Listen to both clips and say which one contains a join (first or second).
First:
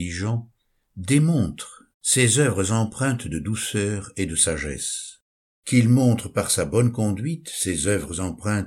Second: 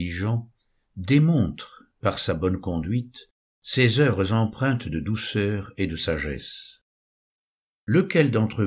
first